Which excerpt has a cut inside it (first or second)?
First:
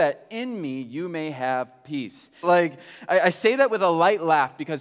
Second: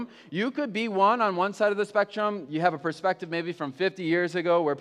first